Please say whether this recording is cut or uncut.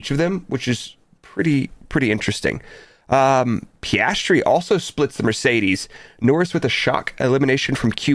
uncut